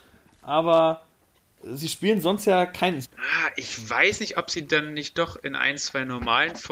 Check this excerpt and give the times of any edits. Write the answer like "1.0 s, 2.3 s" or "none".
3.0 s